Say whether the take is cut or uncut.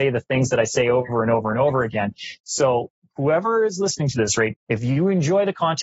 cut